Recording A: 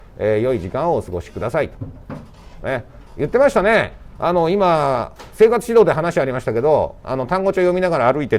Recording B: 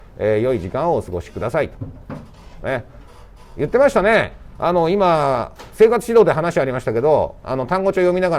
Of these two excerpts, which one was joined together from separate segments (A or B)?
A